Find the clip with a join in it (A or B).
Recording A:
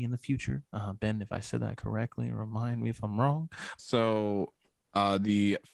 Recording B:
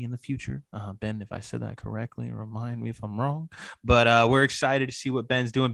A